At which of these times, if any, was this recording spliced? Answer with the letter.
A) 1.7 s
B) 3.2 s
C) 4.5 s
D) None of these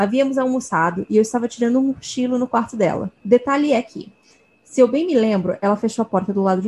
B